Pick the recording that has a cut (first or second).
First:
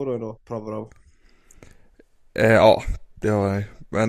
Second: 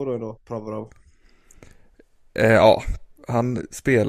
second